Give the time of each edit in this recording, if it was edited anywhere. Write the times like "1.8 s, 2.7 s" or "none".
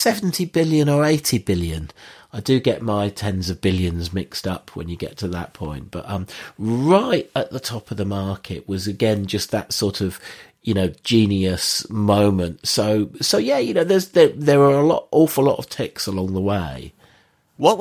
none